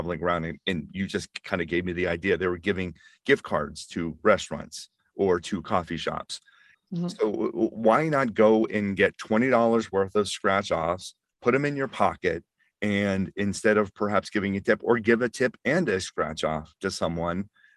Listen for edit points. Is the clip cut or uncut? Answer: cut